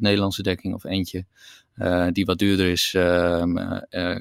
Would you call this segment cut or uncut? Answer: uncut